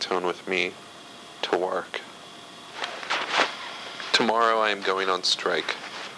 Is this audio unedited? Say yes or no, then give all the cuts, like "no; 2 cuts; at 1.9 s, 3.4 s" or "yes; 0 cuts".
yes; 0 cuts